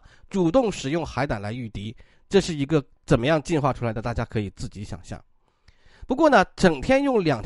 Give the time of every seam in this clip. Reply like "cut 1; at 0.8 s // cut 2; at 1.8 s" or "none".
none